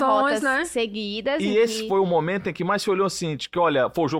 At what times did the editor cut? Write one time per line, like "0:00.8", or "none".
none

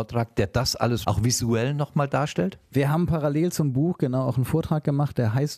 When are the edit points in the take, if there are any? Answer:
0:01.0

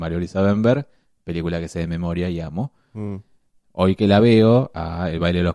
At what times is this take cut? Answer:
none

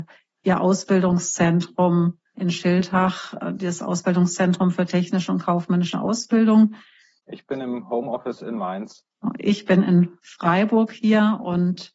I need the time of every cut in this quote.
0:07.2

